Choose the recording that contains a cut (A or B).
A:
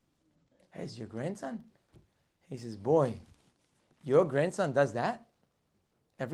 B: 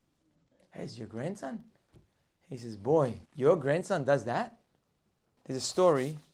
B